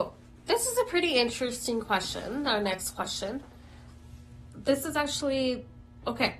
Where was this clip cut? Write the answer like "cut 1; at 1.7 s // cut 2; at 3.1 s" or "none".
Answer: none

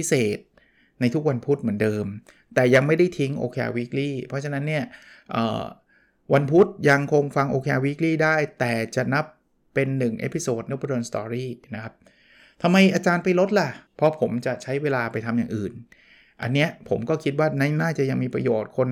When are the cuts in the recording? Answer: cut 1; at 10.7 s // cut 2; at 13.9 s

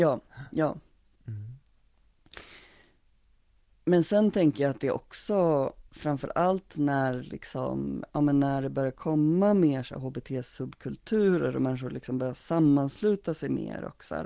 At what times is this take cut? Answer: none

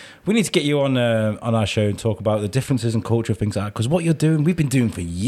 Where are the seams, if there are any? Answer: none

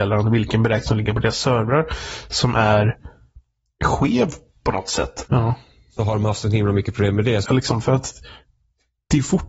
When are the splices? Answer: cut 1; at 5.3 s // cut 2; at 7.4 s

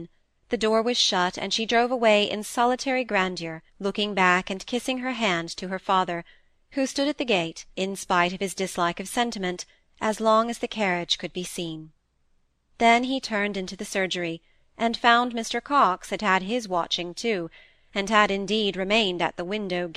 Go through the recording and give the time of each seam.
cut 1; at 3.7 s // cut 2; at 7.7 s

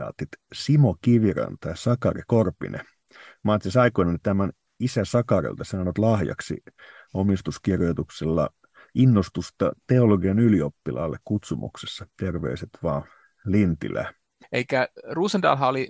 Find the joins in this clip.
cut 1; at 14.4 s

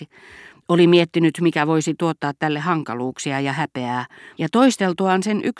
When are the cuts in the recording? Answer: cut 1; at 4.3 s

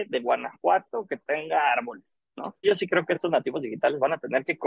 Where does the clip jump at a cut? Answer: cut 1; at 2.6 s

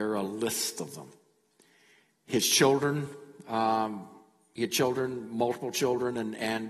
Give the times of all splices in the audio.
none

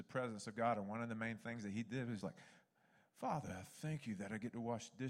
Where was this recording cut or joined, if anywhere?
cut 1; at 2.2 s

